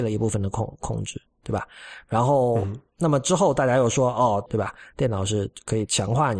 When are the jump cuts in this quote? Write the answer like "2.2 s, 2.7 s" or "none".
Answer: 4.5 s